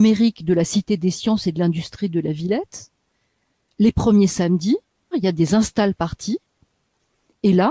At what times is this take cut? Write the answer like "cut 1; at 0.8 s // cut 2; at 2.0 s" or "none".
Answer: cut 1; at 5.1 s